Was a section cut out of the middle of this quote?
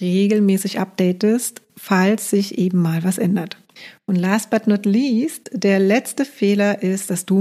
no; 0 cuts

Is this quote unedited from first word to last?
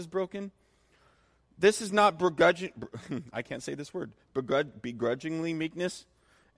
yes; 0 cuts

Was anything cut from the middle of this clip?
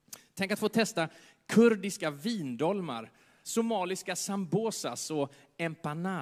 yes; 1 cut; at 3.4 s

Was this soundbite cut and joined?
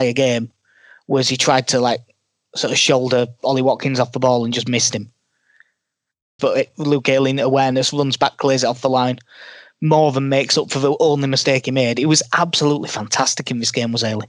yes; 1 cut; at 6.4 s

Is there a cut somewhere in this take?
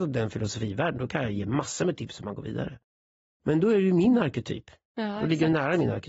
no; 0 cuts

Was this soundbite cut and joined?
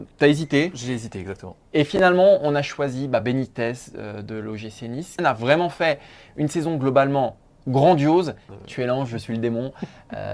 yes; 2 cuts; at 5.2 s, 8.5 s

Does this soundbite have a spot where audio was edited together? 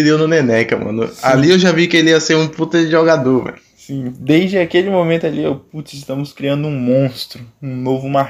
no; 0 cuts

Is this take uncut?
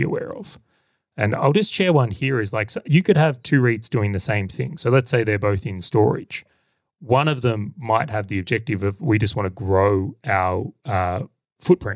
yes; 0 cuts

